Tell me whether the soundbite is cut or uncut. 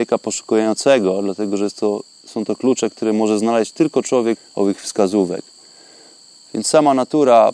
cut